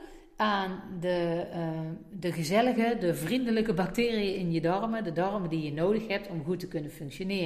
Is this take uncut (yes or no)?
yes